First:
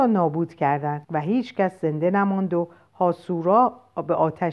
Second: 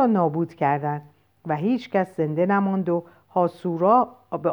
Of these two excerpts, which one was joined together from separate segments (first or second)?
first